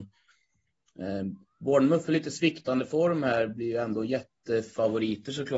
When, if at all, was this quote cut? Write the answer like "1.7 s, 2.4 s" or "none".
none